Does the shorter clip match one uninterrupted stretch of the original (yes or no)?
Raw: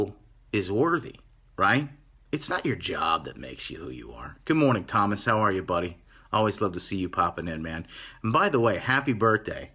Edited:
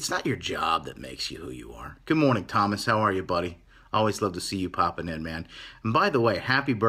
yes